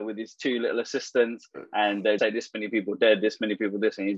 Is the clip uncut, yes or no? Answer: no